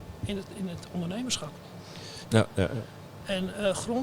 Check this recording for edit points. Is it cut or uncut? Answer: cut